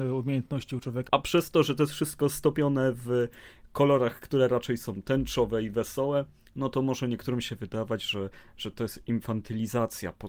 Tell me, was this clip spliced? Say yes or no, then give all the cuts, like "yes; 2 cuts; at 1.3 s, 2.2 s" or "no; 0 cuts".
yes; 1 cut; at 1.1 s